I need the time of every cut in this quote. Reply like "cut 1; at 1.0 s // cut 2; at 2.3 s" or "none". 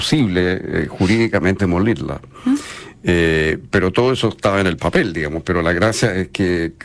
cut 1; at 1.6 s